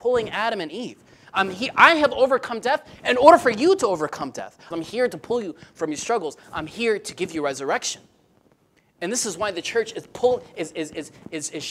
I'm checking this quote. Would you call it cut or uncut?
cut